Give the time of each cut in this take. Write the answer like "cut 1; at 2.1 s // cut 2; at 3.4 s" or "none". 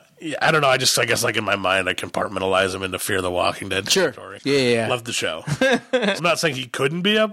cut 1; at 4.4 s // cut 2; at 6.2 s